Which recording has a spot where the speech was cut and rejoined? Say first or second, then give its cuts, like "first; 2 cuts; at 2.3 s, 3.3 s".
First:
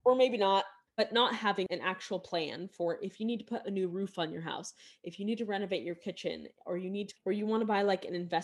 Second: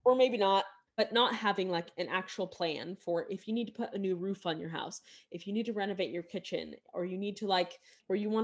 first; 2 cuts; at 1.7 s, 7.1 s